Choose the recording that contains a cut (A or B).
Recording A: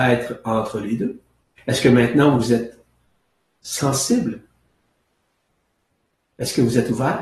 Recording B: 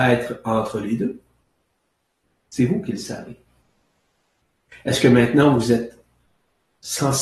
A